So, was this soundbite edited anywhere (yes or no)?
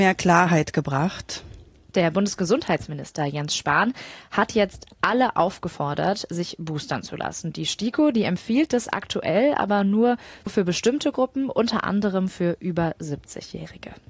no